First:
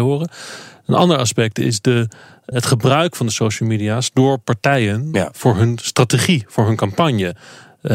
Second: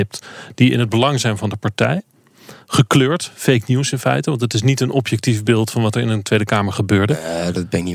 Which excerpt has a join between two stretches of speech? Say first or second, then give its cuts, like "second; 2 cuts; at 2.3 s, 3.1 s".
first; 1 cut; at 2.5 s